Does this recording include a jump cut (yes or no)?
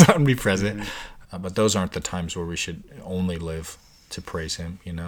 yes